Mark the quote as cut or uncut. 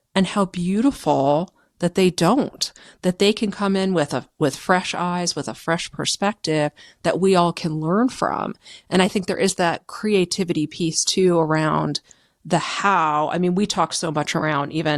uncut